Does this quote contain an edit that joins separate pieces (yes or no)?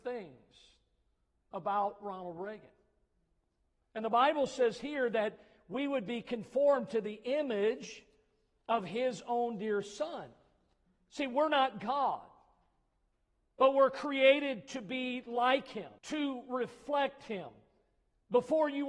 yes